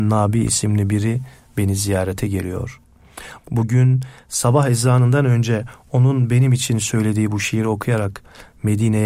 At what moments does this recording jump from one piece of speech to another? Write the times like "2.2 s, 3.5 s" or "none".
3.4 s